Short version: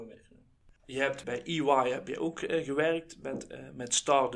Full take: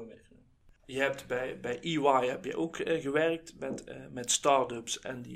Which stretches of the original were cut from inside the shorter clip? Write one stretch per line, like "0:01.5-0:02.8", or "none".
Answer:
0:01.2-0:01.6

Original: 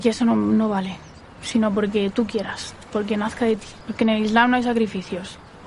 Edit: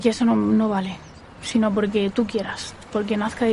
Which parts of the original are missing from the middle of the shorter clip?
none

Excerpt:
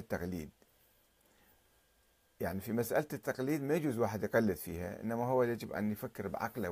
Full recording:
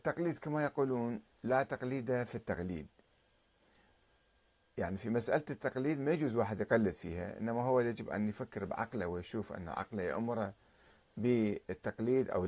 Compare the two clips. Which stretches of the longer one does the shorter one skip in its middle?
none

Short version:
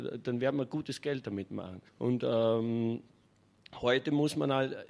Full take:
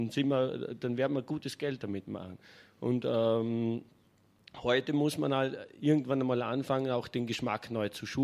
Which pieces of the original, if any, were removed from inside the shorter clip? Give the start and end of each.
0:02.5-0:02.7

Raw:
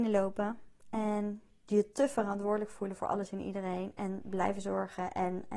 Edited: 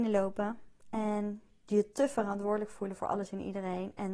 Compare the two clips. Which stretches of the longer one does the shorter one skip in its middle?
none

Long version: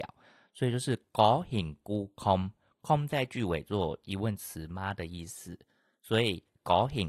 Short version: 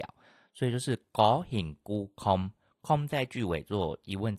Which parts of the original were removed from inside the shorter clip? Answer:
none

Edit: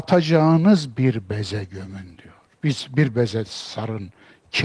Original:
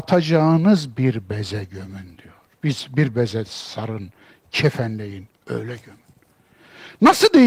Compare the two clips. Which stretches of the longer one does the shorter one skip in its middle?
none

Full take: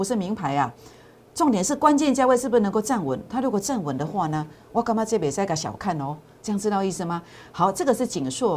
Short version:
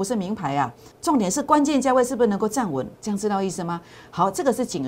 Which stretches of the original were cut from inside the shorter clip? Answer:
0:00.9-0:01.2
0:03.3-0:06.4

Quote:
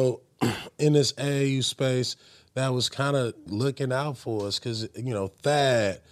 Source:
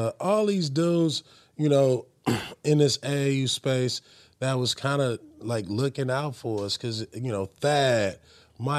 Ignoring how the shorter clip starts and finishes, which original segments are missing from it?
0:05.3-0:05.6

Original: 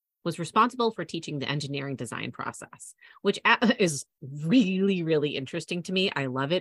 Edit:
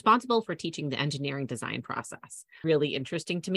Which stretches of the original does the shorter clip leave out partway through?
0:03.1-0:05.1

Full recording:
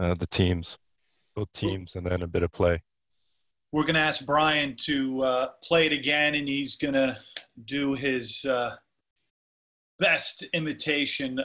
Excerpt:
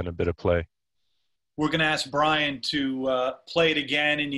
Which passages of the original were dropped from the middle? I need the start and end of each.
none

